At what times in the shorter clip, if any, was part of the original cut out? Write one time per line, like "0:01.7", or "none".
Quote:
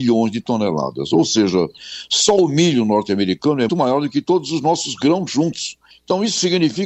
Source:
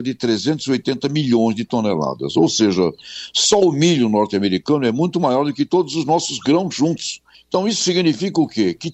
0:03.7